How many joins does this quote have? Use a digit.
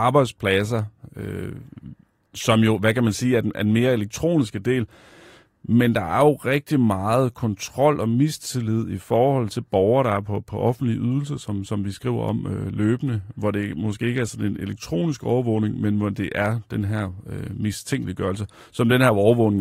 0